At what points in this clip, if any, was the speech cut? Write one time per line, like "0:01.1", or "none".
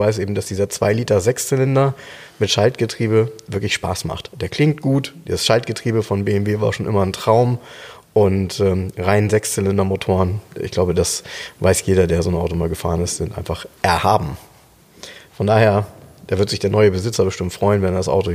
none